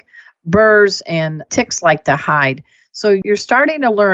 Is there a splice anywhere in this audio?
no; 0 cuts

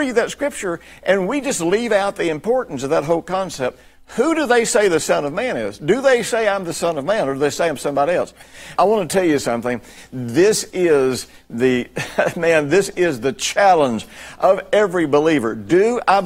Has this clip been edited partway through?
yes; 1 cut; at 8.8 s

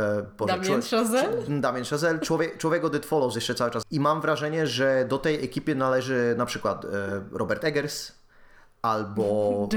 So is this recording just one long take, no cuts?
no; 1 cut; at 3.8 s

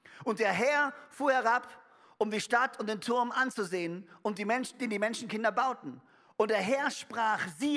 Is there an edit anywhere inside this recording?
no; 0 cuts

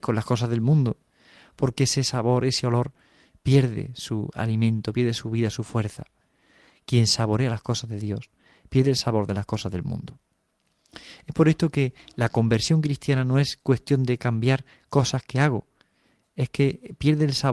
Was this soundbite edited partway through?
no; 0 cuts

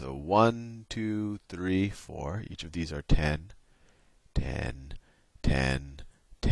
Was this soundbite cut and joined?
no; 0 cuts

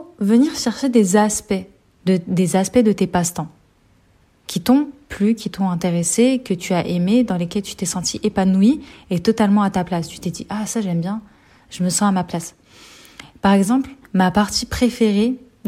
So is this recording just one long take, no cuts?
no; 2 cuts; at 2.0 s, 14.0 s

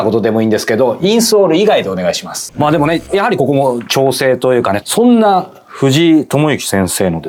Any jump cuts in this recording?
yes; 2 cuts; at 2.5 s, 4.8 s

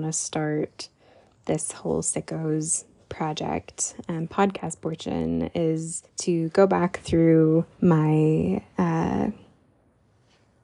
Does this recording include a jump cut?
yes; 3 cuts; at 4.3 s, 6.1 s, 7.7 s

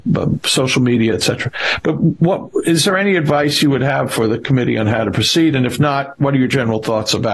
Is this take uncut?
yes; 0 cuts

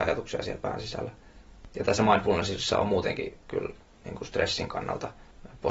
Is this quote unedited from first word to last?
yes; 0 cuts

